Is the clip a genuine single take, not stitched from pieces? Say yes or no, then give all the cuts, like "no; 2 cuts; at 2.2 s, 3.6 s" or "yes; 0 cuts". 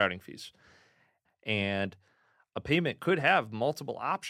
no; 1 cut; at 1.2 s